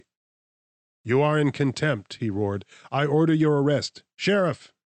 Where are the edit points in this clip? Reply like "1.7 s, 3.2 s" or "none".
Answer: none